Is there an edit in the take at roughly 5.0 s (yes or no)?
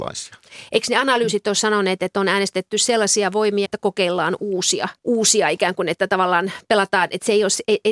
yes